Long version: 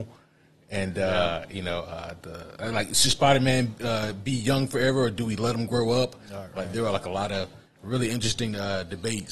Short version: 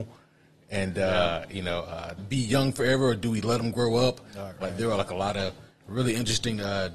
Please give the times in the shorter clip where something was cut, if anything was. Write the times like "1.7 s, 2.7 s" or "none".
2.2 s